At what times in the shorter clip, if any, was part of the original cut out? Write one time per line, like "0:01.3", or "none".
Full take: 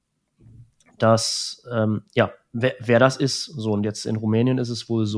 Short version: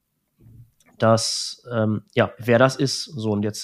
0:02.4